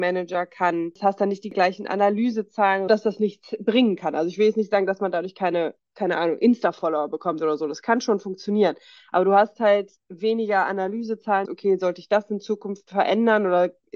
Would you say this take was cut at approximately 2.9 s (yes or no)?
yes